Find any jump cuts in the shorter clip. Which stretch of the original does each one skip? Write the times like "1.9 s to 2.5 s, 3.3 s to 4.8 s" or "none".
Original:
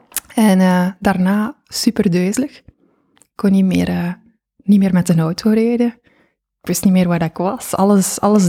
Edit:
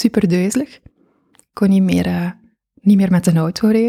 none